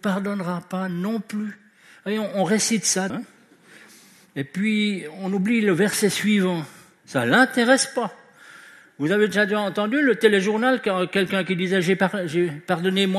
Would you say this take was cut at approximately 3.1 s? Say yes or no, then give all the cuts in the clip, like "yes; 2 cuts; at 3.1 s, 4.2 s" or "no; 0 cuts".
yes; 2 cuts; at 3.1 s, 7.0 s